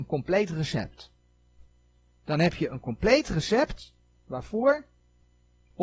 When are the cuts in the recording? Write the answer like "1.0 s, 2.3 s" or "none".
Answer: none